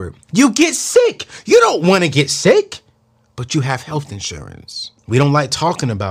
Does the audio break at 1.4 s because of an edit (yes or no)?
no